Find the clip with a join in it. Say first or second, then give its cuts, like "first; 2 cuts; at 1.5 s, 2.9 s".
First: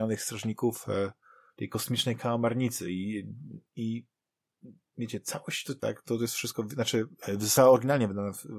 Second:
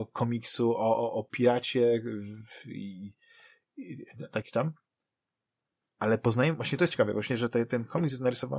first; 2 cuts; at 3.7 s, 5.8 s